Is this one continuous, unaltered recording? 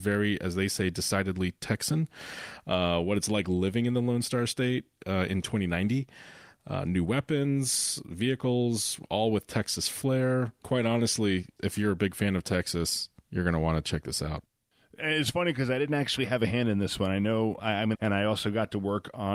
no; 1 cut; at 17.9 s

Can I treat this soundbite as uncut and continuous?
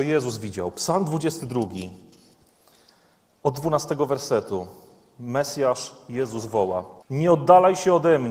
no; 1 cut; at 7.0 s

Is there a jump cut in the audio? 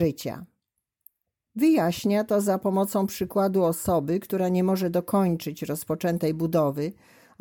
yes; 1 cut; at 1.5 s

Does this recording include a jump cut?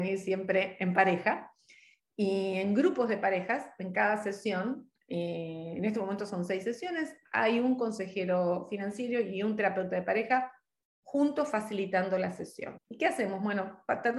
yes; 1 cut; at 12.7 s

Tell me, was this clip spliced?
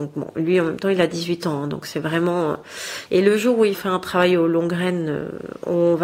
yes; 1 cut; at 3.1 s

